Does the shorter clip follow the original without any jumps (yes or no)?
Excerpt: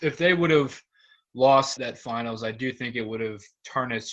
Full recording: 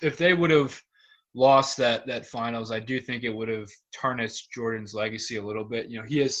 no